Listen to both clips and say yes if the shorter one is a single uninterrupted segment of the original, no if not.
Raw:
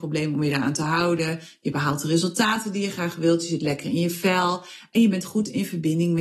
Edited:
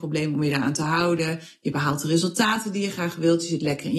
yes